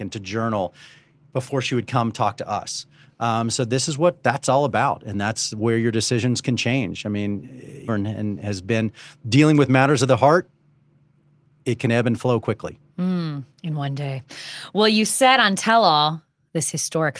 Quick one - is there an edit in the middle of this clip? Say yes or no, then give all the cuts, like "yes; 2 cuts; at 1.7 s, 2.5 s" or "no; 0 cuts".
yes; 1 cut; at 7.9 s